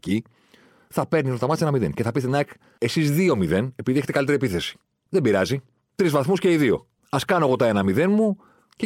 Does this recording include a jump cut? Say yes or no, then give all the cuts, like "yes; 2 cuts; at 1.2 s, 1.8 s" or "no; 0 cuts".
yes; 1 cut; at 2.8 s